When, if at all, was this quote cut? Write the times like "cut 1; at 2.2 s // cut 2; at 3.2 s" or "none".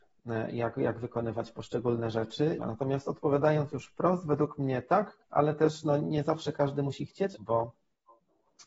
cut 1; at 2.6 s // cut 2; at 5.2 s // cut 3; at 7.3 s